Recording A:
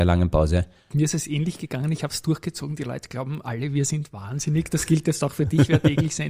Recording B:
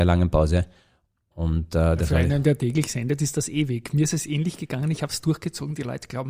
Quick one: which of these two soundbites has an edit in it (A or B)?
A